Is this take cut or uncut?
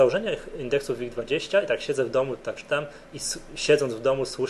cut